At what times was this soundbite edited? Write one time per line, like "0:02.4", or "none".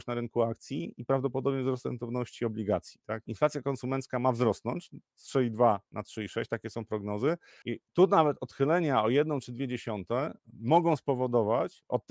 0:03.3
0:07.6